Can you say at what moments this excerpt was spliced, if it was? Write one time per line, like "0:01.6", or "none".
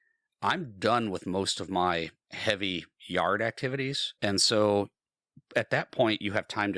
0:04.2